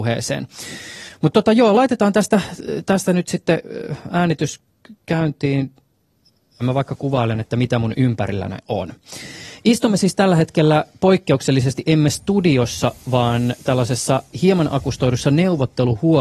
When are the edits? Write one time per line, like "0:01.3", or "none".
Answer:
none